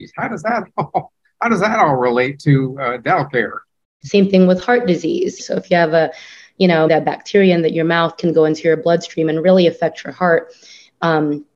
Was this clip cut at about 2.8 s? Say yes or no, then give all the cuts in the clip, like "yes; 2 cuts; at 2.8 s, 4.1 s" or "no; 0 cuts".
no; 3 cuts; at 4.0 s, 5.4 s, 6.9 s